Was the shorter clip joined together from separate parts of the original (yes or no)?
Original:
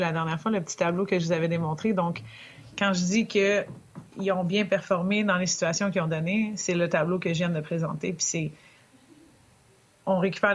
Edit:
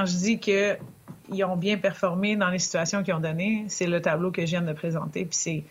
no